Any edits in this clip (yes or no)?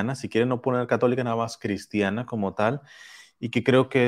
no